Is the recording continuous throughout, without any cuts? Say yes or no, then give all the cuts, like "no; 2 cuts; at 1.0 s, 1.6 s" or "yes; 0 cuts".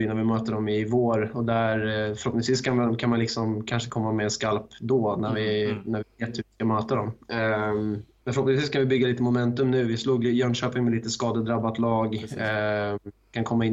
no; 1 cut; at 8.2 s